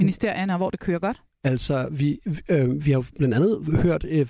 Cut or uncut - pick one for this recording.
uncut